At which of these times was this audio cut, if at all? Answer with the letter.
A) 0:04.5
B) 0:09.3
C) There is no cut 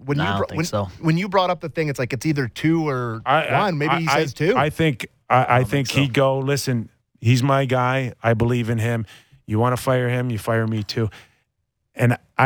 C